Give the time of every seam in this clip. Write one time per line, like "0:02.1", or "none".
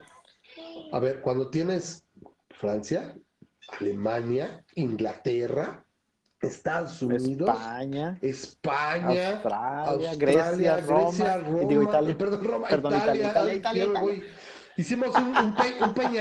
none